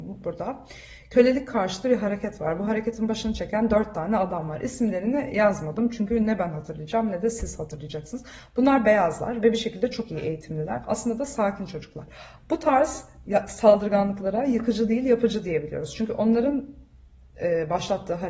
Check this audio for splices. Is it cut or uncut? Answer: cut